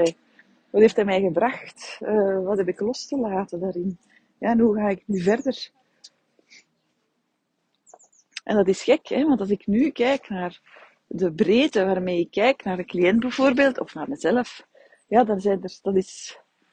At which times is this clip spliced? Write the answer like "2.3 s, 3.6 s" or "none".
8.4 s